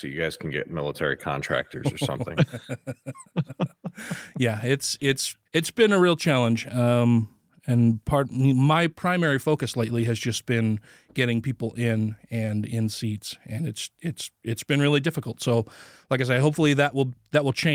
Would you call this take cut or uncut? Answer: cut